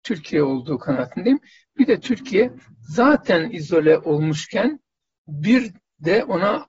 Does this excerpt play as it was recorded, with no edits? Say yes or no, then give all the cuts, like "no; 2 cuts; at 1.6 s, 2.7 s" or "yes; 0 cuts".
yes; 0 cuts